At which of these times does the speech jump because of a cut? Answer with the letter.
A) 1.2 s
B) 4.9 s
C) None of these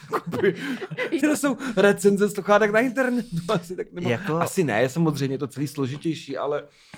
A